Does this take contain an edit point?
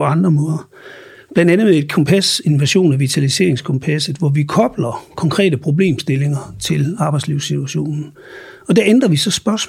no; 0 cuts

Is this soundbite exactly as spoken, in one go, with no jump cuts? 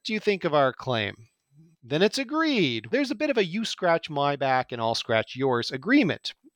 no; 2 cuts; at 1.7 s, 2.9 s

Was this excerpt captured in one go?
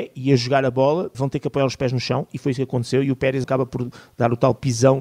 no; 2 cuts; at 1.1 s, 3.4 s

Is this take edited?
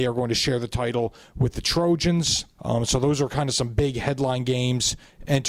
yes; 1 cut; at 2.6 s

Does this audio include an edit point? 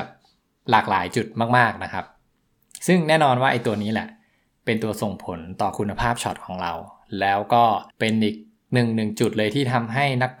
yes; 1 cut; at 7.9 s

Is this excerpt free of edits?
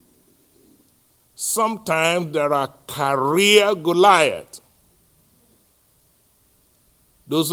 no; 1 cut; at 1.2 s

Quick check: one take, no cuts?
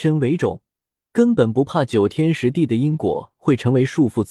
yes; 0 cuts

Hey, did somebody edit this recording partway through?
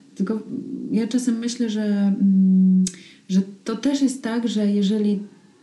no; 0 cuts

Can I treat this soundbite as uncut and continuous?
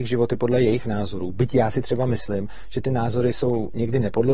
yes; 0 cuts

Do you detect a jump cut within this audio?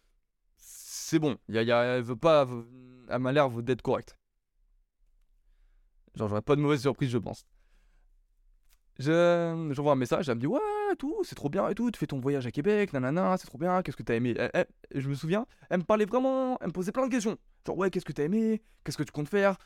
no; 0 cuts

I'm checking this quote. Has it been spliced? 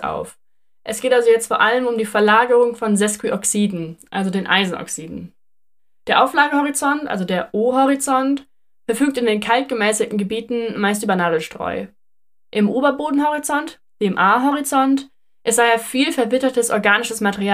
no; 0 cuts

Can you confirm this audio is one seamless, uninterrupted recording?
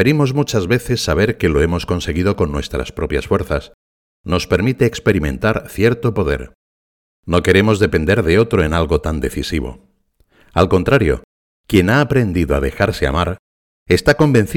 no; 1 cut; at 4.0 s

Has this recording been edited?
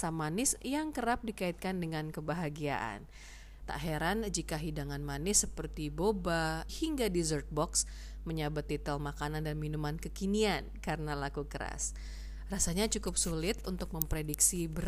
yes; 2 cuts; at 3.6 s, 6.7 s

